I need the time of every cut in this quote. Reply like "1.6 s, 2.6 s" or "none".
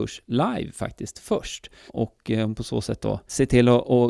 1.9 s